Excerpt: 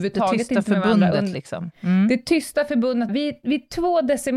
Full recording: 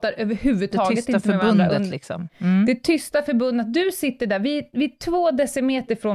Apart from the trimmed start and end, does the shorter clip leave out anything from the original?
yes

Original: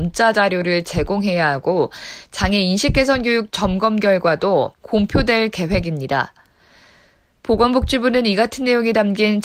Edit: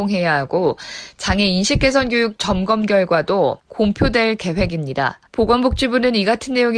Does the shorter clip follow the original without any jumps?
no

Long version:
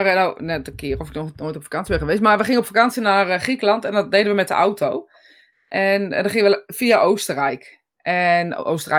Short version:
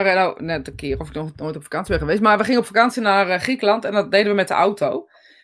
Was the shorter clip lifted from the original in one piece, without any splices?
yes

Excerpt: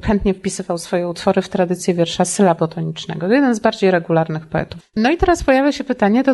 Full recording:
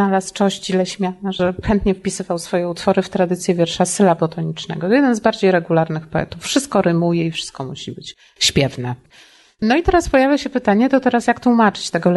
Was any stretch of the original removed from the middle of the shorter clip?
yes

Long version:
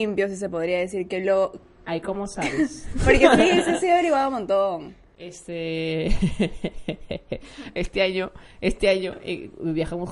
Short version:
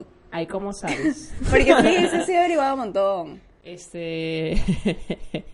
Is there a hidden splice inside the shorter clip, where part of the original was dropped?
no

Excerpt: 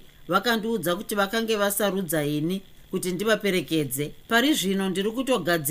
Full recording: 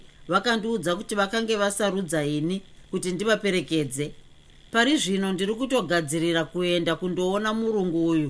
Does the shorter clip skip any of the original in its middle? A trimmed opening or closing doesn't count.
yes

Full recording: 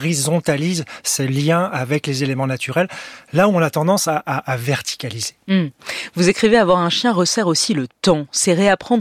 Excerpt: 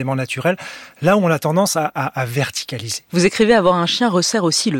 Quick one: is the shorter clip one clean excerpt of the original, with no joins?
no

